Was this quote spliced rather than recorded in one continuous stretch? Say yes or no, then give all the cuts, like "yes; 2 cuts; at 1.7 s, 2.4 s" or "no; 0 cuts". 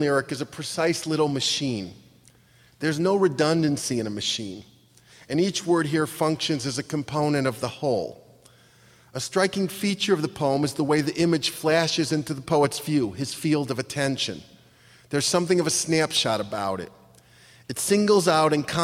no; 0 cuts